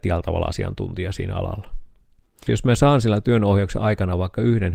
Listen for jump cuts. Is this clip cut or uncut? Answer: cut